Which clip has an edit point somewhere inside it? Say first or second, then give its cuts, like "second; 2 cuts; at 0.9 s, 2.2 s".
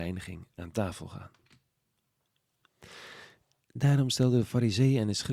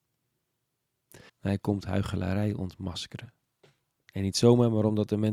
second; 1 cut; at 1.3 s